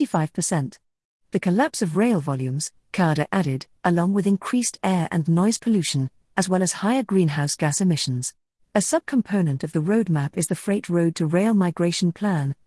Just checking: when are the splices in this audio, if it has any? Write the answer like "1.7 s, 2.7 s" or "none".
3.8 s, 8.6 s